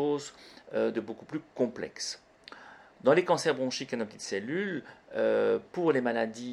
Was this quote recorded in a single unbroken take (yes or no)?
yes